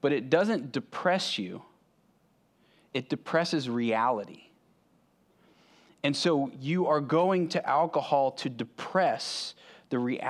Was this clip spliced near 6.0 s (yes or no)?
no